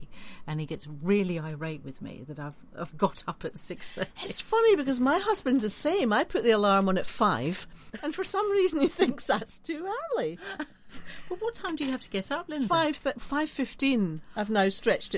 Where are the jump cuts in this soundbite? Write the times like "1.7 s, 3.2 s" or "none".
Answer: 13.2 s